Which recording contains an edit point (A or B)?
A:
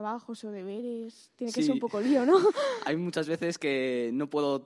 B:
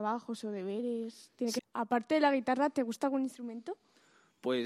B